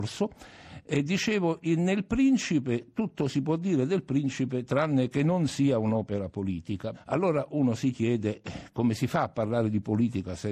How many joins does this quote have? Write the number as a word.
one